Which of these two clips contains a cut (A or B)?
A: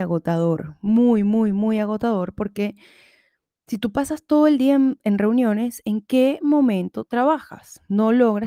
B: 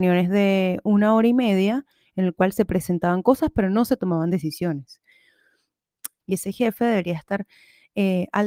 B